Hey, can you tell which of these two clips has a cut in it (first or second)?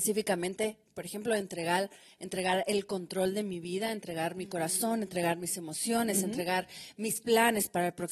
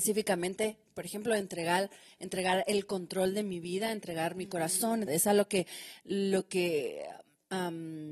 second